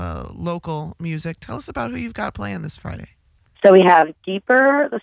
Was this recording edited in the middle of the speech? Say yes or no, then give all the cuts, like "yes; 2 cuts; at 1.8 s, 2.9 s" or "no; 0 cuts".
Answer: no; 0 cuts